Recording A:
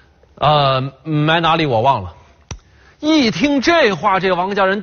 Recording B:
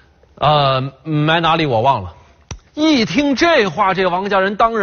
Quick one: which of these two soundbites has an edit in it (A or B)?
B